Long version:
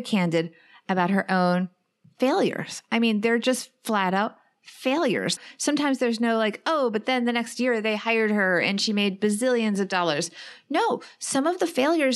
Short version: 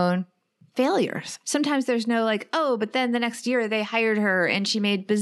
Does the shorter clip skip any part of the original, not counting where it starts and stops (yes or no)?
yes